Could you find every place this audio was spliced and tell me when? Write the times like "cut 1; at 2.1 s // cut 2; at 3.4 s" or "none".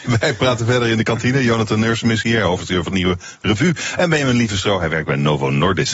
none